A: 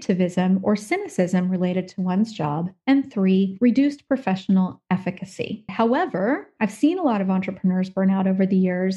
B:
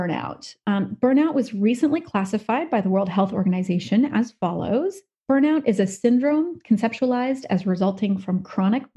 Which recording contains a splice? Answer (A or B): A